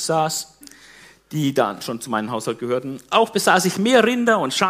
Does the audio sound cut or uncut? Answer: uncut